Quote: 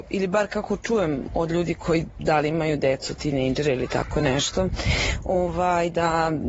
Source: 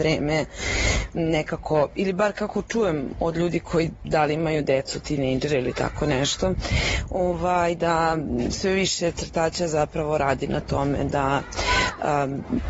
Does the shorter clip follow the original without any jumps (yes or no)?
yes